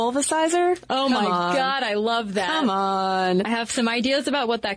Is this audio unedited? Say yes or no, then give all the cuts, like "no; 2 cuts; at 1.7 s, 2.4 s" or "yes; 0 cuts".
yes; 0 cuts